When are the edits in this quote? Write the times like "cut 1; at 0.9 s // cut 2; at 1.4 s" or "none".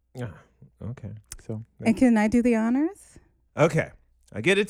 cut 1; at 3.5 s